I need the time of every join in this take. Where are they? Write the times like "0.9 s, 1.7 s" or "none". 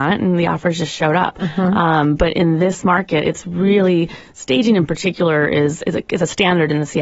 none